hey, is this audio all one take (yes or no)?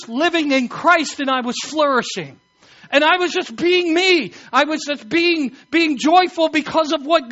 yes